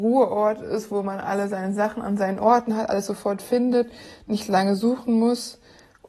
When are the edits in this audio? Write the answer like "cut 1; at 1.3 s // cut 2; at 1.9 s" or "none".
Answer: none